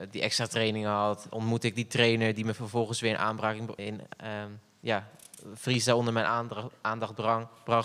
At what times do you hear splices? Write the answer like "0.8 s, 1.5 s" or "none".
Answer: 3.8 s